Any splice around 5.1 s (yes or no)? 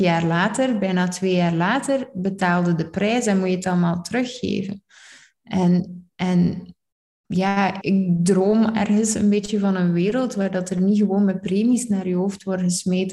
no